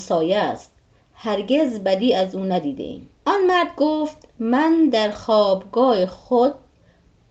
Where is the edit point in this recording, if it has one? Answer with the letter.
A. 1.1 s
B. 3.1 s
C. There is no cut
B